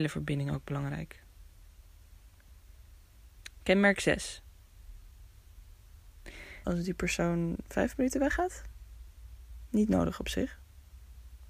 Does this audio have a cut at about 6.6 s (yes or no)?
yes